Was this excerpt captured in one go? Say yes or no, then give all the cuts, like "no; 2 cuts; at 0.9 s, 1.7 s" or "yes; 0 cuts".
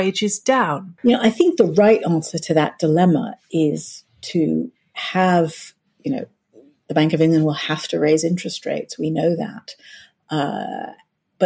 no; 1 cut; at 1.0 s